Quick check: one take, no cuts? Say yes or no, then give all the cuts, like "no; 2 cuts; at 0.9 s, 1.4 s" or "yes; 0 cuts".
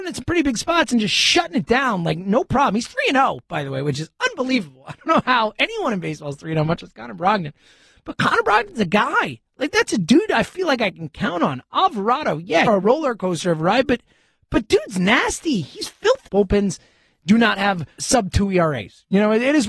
no; 3 cuts; at 12.7 s, 16.3 s, 18.0 s